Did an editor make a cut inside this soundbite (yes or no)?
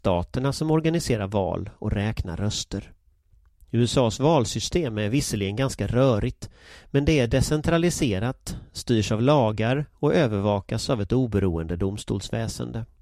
no